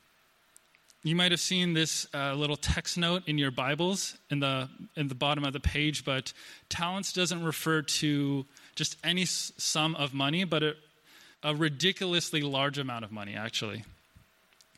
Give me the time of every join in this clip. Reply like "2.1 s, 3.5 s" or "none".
11.3 s

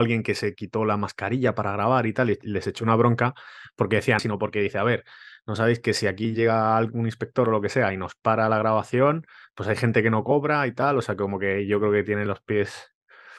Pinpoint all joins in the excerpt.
4.2 s

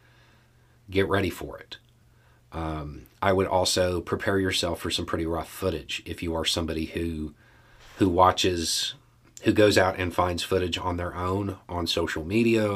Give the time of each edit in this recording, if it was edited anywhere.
none

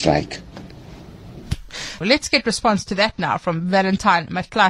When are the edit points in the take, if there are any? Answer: 2.0 s

